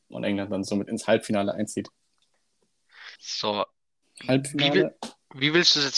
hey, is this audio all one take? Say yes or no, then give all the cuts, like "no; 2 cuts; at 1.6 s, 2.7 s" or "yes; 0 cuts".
no; 1 cut; at 3.1 s